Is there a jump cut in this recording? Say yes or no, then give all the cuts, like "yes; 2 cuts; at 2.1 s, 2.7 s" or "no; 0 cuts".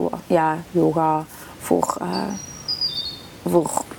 no; 0 cuts